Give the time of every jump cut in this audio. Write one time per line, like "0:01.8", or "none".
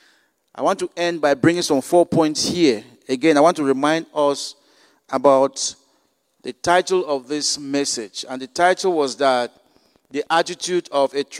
none